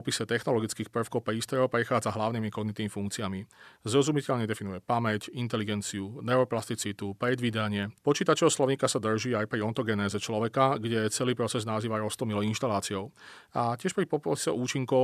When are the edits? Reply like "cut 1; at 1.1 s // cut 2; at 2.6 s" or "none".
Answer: cut 1; at 8.0 s